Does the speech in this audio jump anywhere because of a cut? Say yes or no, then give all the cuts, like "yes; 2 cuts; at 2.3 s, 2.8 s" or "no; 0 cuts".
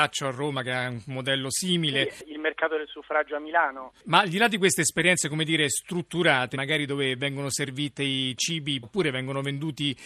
yes; 2 cuts; at 6.5 s, 8.8 s